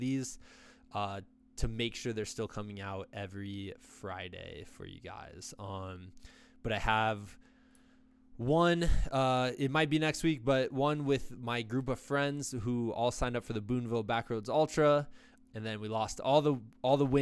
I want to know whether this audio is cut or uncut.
cut